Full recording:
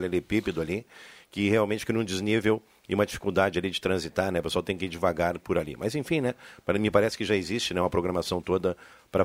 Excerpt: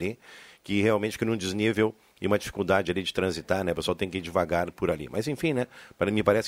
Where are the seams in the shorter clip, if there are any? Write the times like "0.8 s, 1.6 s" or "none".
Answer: none